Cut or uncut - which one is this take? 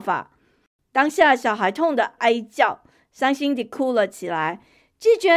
cut